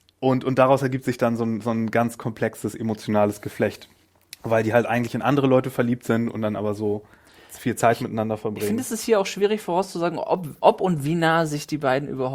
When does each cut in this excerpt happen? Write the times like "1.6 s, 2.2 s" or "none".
none